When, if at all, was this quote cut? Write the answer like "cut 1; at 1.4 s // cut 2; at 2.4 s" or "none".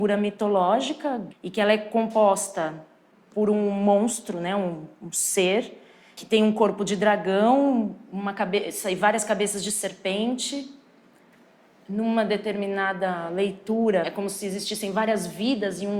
none